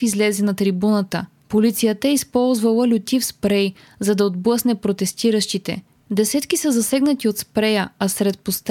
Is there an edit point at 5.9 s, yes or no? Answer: no